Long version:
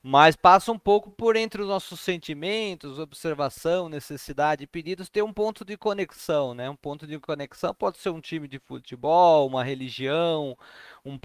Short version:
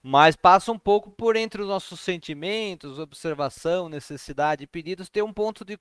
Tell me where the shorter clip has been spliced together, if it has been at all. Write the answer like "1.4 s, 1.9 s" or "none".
none

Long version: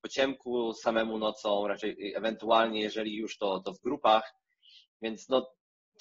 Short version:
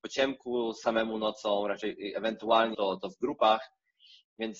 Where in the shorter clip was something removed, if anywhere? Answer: 2.7 s

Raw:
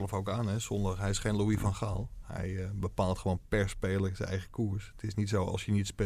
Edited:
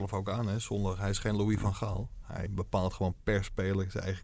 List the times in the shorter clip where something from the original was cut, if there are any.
2.5 s

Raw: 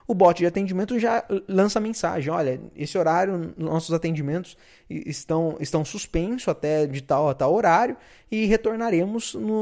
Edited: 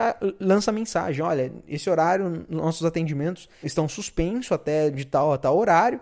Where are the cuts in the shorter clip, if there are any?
3.6 s

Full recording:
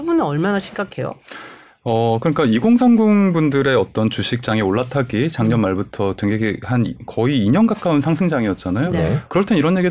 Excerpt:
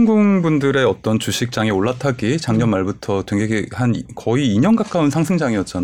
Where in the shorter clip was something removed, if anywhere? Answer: none

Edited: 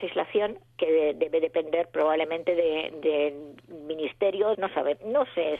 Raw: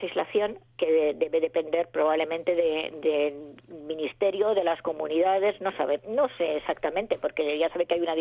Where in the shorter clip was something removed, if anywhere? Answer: 4.5 s

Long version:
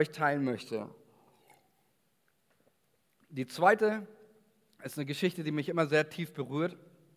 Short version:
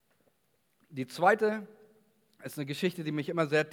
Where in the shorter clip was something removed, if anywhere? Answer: none

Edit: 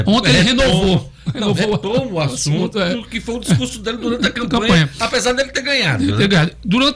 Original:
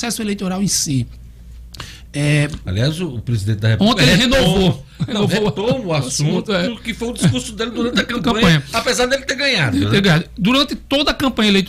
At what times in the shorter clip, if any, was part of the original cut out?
none

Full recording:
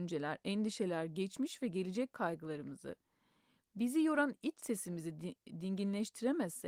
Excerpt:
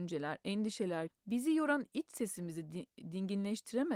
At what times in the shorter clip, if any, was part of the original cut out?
1.1 s

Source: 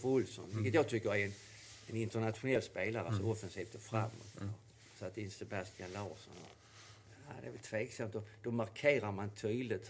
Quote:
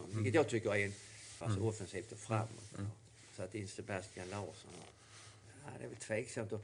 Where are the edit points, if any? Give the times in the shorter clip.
1.4 s

